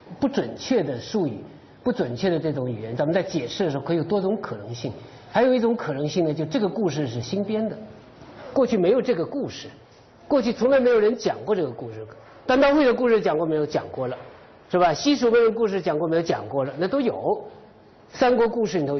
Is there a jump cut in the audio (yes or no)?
no